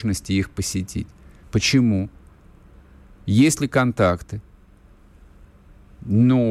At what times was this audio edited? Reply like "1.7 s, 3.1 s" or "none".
1.4 s

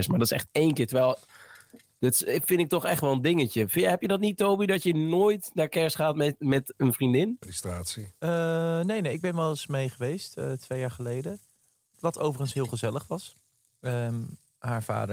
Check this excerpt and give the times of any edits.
7.4 s

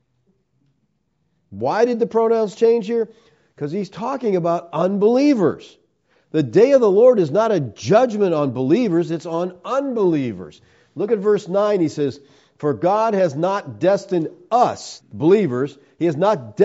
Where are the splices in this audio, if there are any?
15.0 s

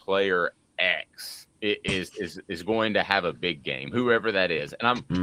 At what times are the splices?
1.5 s

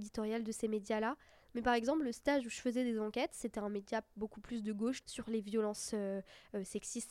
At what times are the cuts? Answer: 5.0 s

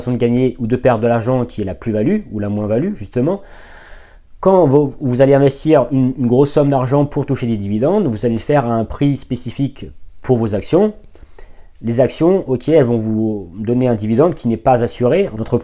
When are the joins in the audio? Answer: none

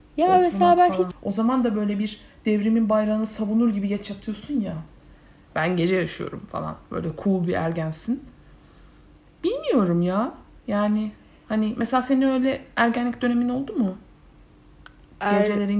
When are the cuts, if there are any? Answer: 1.1 s

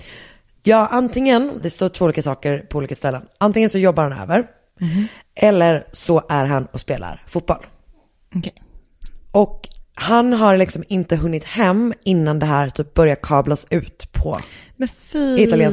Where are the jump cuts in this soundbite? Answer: 1.6 s

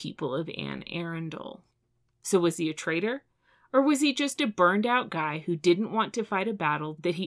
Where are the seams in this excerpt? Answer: none

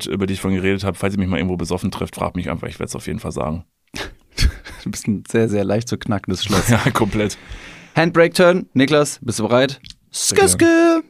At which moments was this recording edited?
3.7 s

